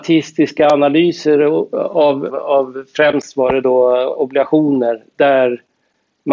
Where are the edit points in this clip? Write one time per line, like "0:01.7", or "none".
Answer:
0:02.3